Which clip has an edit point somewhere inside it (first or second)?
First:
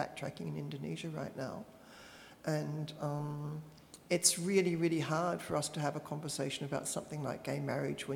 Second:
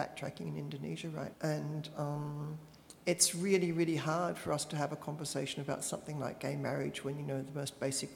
second